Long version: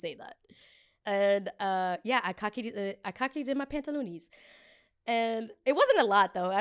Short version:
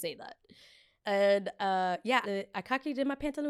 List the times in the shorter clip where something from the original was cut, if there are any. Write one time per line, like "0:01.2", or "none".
0:02.2